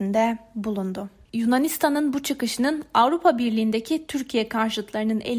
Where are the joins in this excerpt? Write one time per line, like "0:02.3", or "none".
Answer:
0:01.3